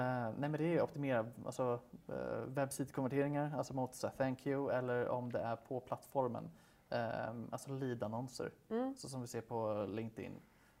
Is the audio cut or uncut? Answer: uncut